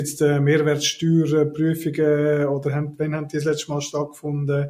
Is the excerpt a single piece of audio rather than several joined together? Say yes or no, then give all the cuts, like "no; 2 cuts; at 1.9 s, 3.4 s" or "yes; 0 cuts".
yes; 0 cuts